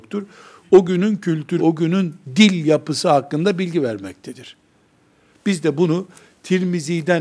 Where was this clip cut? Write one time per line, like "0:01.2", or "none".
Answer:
0:01.6

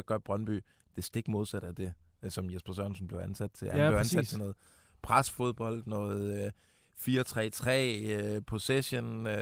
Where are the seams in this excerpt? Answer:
none

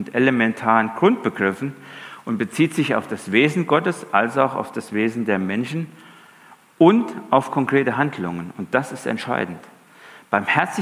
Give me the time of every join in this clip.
none

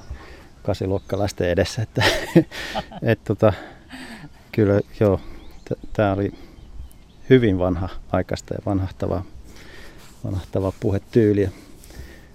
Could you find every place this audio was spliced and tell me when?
none

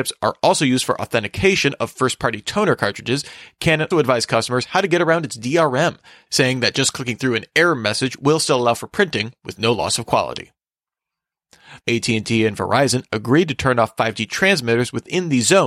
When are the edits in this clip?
0:03.9
0:11.8

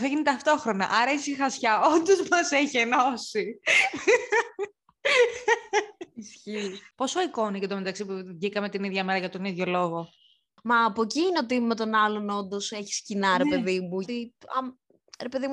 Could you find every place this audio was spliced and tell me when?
0:06.9
0:14.0

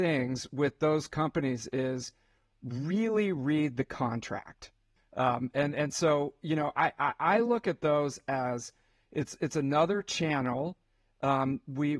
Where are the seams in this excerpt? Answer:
0:05.0

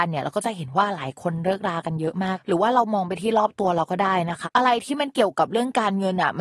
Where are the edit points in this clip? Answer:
0:04.4

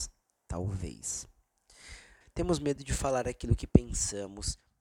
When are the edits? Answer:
0:02.2

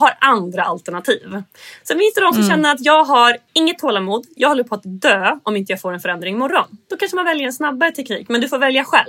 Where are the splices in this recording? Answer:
0:03.5

